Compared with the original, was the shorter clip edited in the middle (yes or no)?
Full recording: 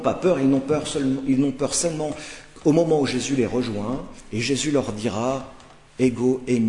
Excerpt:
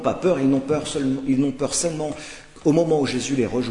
no